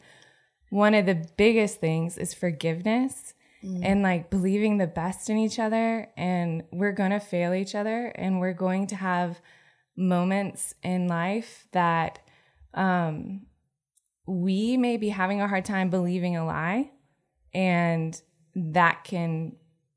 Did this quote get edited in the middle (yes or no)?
no